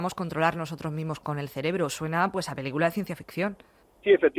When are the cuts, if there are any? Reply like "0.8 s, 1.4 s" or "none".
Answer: 1.2 s